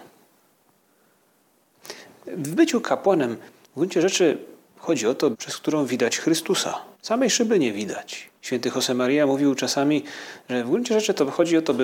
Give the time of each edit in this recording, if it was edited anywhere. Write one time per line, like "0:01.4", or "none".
0:05.3
0:06.9
0:08.4